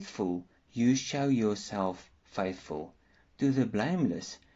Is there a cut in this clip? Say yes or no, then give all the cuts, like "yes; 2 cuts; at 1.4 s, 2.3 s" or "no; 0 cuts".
no; 0 cuts